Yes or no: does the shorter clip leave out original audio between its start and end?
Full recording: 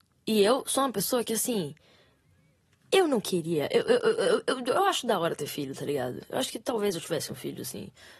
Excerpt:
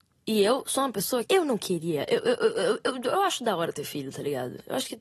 yes